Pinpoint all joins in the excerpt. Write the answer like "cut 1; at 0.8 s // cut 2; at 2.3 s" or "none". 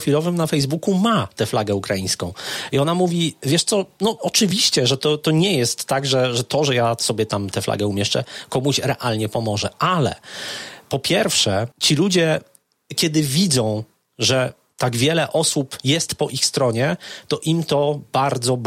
cut 1; at 11.7 s